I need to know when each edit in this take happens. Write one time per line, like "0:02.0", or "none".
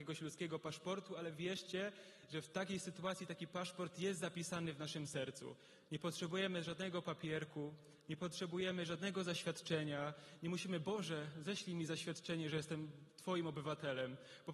none